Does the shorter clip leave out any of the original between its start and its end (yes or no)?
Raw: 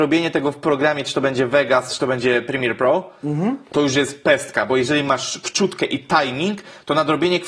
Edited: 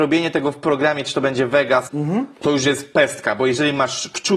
yes